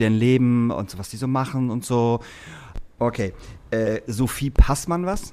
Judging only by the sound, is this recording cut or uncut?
cut